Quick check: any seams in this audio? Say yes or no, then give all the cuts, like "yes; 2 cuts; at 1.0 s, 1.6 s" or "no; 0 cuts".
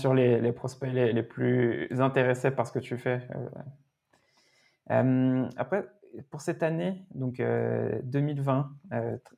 no; 0 cuts